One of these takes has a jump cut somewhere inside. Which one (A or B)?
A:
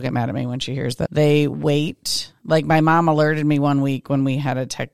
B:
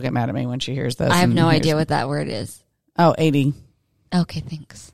A